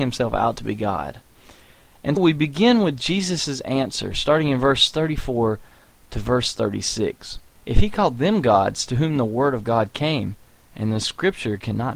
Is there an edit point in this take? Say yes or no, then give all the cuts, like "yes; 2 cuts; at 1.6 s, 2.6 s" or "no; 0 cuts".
yes; 2 cuts; at 2.2 s, 7.6 s